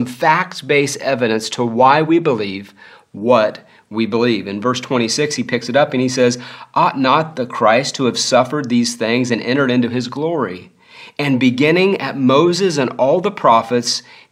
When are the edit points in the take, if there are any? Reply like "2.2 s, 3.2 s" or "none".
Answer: none